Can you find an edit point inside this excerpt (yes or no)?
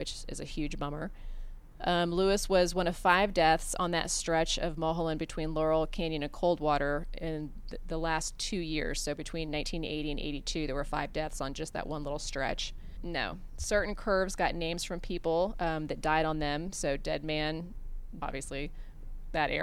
yes